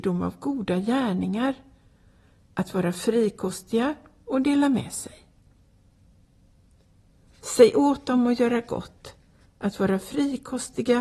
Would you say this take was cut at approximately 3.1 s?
no; 2 cuts; at 7.4 s, 9.5 s

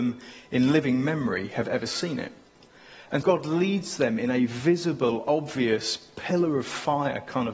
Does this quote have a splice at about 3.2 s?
yes; 1 cut; at 3.2 s

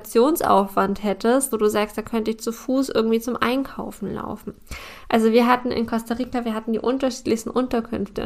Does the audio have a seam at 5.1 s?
no; 1 cut; at 1.5 s

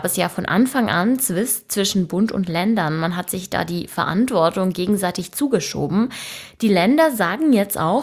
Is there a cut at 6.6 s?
no; 0 cuts

